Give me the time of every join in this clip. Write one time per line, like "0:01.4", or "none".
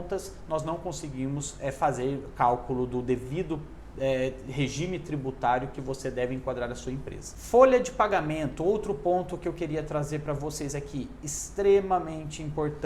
none